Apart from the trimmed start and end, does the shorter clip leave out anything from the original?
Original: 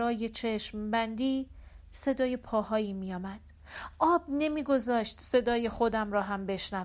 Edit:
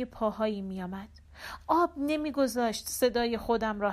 no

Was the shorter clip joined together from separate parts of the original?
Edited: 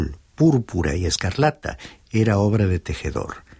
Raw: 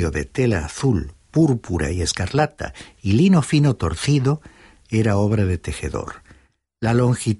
yes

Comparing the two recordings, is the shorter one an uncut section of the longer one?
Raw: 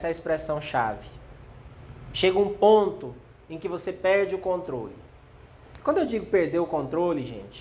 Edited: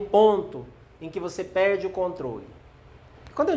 yes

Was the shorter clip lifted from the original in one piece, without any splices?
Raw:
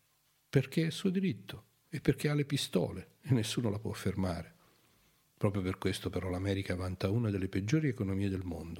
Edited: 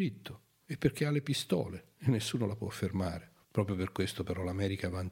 no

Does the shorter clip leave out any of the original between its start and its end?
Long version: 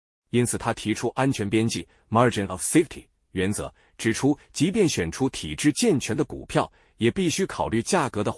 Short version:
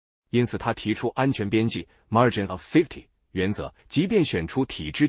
yes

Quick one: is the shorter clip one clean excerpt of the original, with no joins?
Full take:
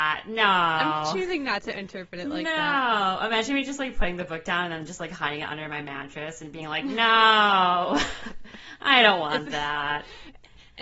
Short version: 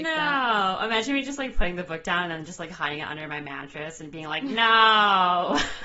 yes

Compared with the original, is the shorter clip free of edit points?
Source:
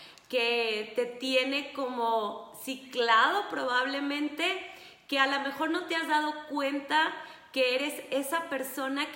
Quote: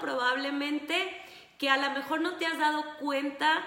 yes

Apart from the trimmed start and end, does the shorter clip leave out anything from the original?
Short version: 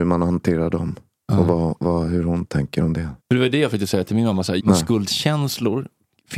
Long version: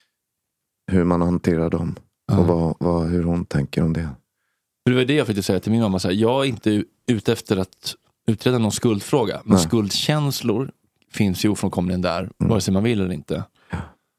yes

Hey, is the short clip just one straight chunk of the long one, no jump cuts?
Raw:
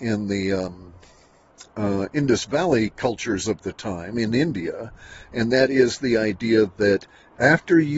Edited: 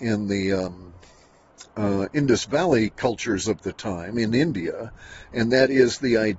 yes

